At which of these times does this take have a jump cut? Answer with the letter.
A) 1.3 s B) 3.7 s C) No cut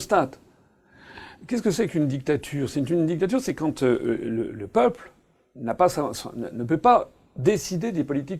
C